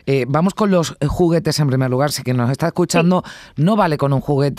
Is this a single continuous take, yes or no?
yes